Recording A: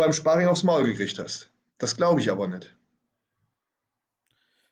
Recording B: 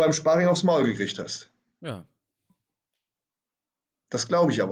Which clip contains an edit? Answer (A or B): A